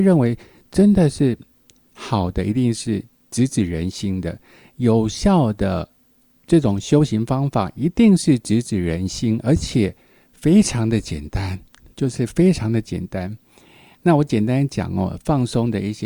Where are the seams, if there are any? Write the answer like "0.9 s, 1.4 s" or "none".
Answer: none